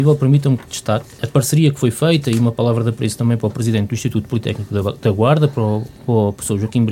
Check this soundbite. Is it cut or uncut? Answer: cut